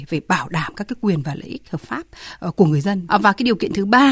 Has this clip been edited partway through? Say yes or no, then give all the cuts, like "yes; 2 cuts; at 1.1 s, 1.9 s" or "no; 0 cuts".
yes; 1 cut; at 3.1 s